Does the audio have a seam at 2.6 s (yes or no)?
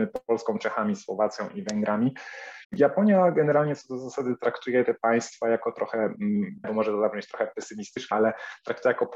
yes